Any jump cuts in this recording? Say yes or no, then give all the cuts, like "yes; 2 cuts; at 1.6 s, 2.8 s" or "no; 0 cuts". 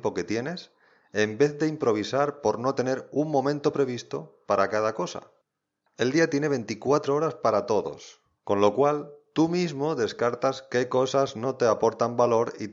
yes; 2 cuts; at 5.9 s, 8.4 s